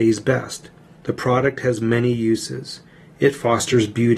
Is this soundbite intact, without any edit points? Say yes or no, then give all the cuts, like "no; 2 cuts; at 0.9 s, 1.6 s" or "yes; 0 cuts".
no; 1 cut; at 1.0 s